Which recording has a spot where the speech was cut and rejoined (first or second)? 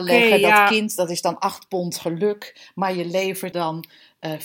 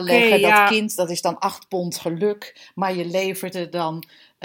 first